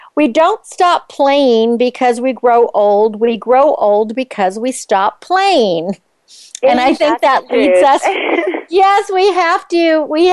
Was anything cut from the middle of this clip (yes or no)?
no